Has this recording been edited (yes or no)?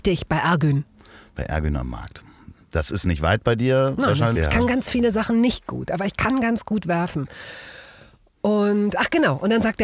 yes